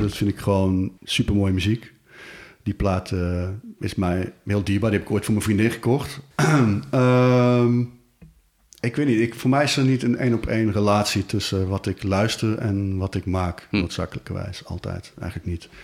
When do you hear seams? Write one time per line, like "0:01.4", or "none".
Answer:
0:01.0
0:06.3